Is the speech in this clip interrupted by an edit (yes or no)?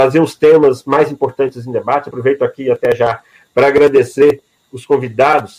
no